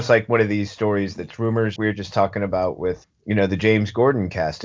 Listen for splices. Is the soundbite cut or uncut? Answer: cut